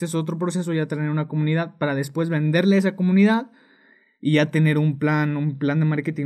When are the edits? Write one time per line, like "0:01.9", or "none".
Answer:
none